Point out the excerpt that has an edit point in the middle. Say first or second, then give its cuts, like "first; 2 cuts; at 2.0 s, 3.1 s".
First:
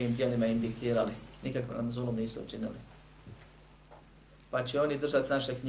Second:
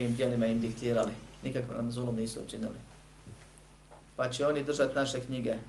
second; 1 cut; at 4.1 s